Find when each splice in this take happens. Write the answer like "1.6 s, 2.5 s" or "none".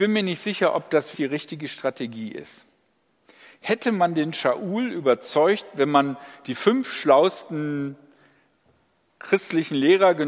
1.1 s